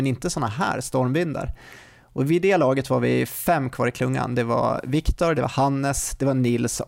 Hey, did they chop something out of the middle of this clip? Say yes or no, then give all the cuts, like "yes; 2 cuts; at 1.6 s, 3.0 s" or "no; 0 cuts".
yes; 1 cut; at 5.3 s